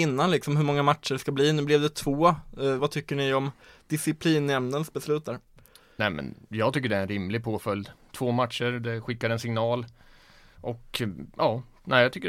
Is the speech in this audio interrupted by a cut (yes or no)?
yes